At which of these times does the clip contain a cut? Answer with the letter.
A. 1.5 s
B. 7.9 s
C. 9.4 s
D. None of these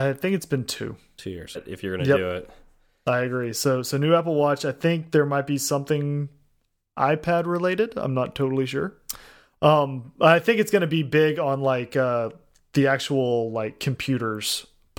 A